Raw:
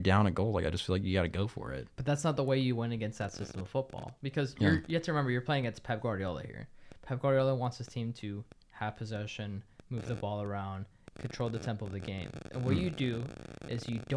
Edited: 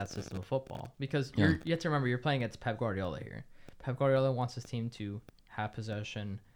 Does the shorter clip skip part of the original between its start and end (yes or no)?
no